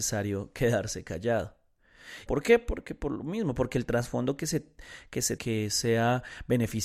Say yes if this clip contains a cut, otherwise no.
yes